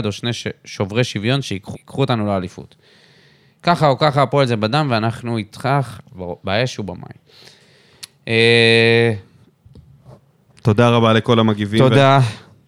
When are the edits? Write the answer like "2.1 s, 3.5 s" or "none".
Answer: 1.7 s